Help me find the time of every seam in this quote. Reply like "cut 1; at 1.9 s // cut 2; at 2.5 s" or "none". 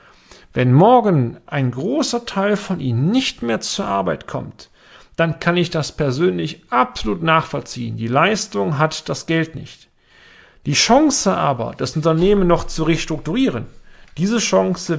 none